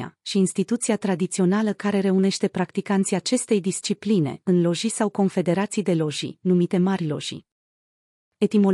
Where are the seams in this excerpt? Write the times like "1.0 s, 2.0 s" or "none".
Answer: none